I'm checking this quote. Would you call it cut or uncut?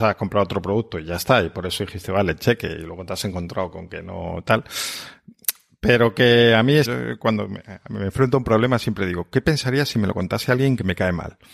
cut